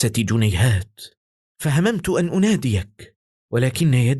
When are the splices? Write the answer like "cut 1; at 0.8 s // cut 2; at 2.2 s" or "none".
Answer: none